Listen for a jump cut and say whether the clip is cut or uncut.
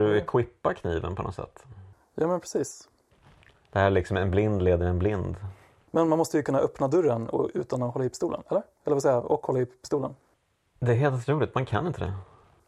uncut